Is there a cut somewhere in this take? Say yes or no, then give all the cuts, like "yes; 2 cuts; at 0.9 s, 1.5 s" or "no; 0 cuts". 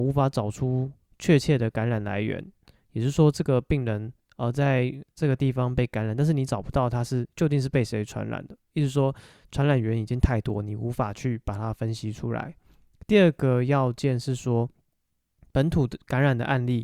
no; 0 cuts